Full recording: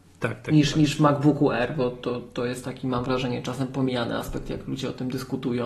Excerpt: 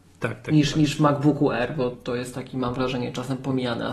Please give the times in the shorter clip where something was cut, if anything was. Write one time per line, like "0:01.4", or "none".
0:01.9